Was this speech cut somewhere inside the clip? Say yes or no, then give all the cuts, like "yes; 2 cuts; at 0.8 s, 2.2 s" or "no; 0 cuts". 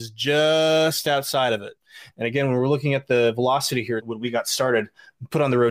yes; 2 cuts; at 2.1 s, 4.0 s